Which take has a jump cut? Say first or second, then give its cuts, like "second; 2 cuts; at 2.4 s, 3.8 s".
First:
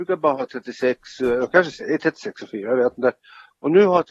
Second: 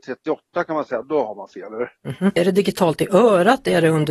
second; 2 cuts; at 1.0 s, 2.4 s